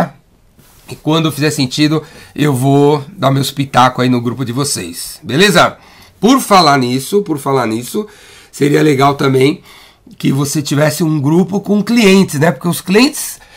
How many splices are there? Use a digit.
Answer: 0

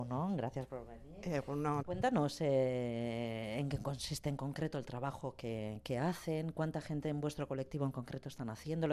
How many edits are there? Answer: 1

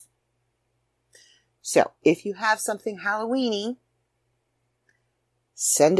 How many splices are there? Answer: 0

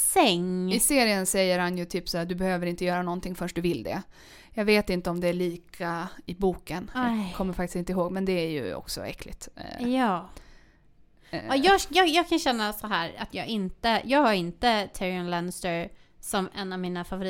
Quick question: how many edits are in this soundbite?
0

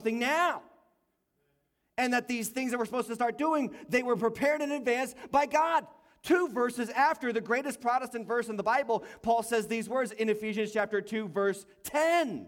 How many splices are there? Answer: 0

